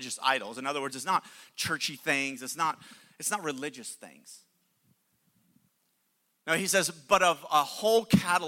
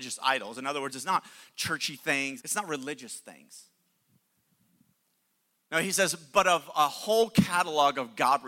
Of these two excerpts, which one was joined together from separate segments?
second; 1 cut; at 2.4 s

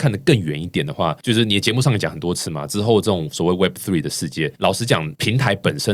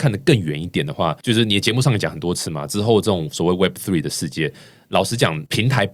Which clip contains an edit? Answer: first; 1 cut; at 4.5 s

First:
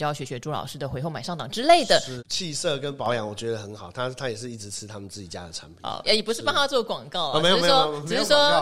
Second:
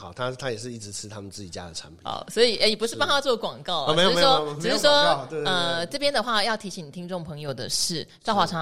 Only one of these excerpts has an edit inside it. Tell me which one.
first; 2 cuts; at 2.2 s, 6.0 s

